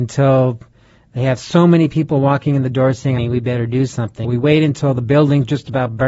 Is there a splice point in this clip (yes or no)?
yes